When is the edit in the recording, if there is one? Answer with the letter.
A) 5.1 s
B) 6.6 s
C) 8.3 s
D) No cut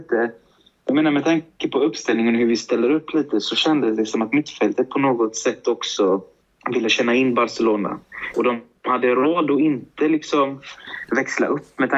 C